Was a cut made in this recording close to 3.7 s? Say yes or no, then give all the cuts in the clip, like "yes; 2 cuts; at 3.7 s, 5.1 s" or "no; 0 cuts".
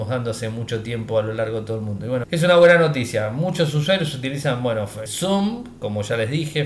no; 2 cuts; at 2.2 s, 5.1 s